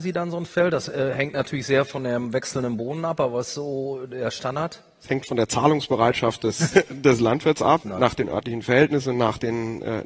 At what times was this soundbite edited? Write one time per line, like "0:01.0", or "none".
0:06.7
0:07.8